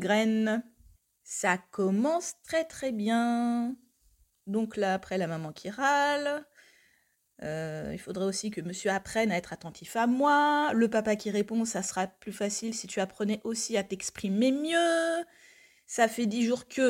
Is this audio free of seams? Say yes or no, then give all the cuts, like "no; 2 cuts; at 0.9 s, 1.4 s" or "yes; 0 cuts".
yes; 0 cuts